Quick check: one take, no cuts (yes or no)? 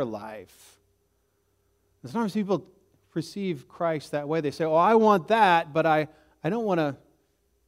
yes